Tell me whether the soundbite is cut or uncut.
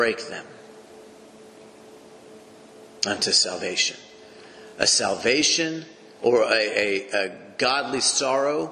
uncut